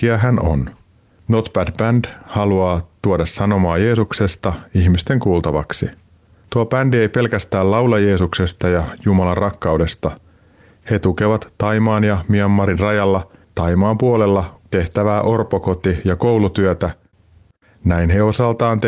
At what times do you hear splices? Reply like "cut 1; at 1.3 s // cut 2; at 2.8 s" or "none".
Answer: cut 1; at 14.6 s